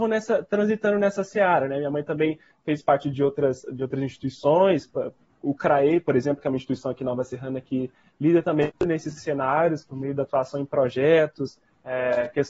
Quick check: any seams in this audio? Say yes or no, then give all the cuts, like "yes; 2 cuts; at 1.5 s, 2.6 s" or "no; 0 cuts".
no; 0 cuts